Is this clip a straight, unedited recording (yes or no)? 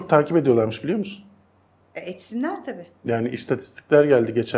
yes